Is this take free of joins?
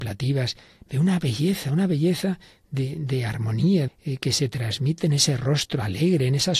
no; 1 cut; at 3.9 s

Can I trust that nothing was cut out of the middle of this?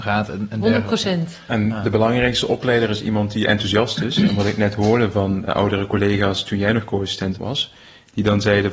no; 2 cuts; at 5.5 s, 7.4 s

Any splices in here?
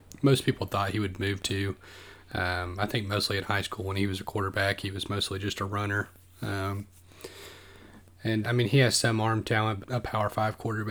yes; 2 cuts; at 8.4 s, 9.8 s

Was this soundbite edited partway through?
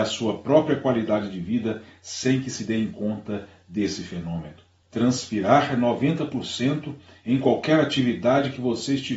yes; 1 cut; at 4.8 s

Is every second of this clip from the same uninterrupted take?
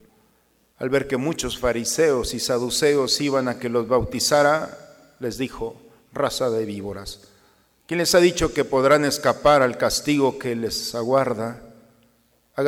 yes; 0 cuts

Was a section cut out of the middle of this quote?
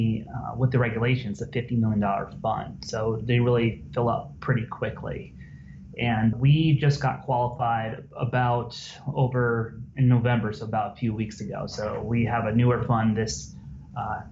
yes; 1 cut; at 6.3 s

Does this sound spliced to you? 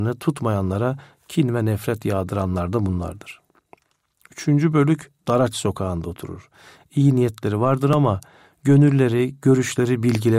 no; 0 cuts

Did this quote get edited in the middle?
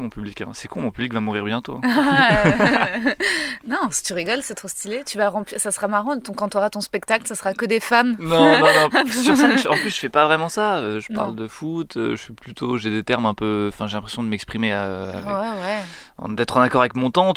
no; 0 cuts

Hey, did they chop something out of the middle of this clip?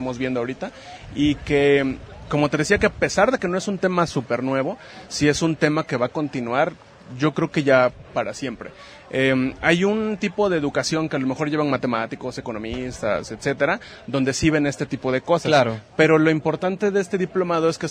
no; 0 cuts

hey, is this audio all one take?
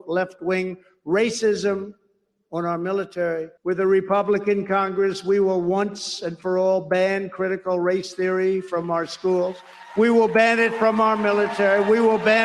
no; 1 cut; at 3.6 s

